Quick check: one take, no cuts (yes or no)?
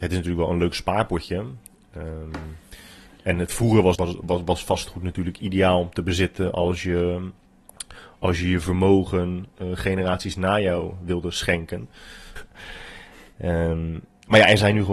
no